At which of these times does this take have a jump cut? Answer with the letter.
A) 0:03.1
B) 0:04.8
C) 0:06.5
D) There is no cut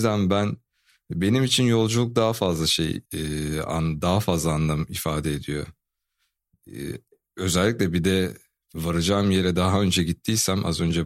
A